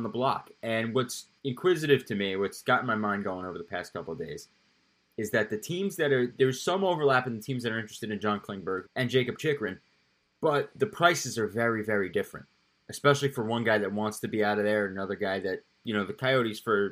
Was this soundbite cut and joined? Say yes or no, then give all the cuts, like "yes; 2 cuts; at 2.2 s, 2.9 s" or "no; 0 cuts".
yes; 2 cuts; at 1.4 s, 8.8 s